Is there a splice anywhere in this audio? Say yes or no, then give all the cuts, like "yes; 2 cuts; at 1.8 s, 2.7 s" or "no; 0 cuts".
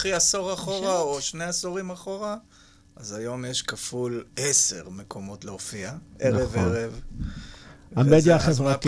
no; 0 cuts